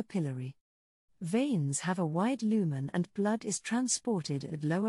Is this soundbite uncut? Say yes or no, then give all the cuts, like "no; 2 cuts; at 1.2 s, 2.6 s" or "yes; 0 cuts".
no; 1 cut; at 1.1 s